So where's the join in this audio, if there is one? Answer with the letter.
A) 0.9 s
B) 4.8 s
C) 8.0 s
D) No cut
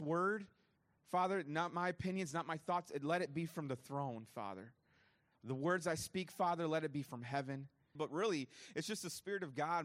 C